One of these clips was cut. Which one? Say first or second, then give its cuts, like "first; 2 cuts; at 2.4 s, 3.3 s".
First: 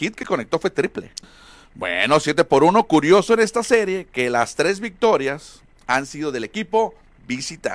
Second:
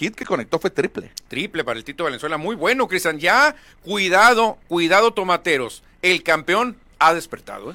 first; 1 cut; at 1.2 s